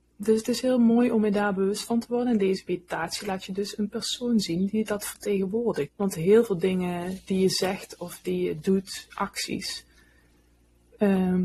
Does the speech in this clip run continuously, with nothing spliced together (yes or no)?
no